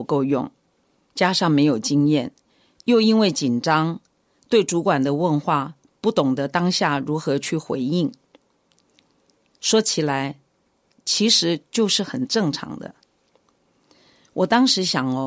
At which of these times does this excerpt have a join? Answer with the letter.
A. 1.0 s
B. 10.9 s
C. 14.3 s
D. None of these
B